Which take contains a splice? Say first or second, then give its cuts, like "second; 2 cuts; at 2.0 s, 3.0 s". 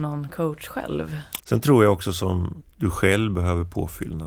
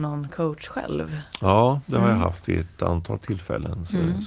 first; 2 cuts; at 1.4 s, 2.6 s